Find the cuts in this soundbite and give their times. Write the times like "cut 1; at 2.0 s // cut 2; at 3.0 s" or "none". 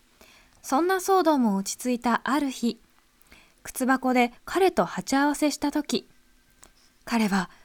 none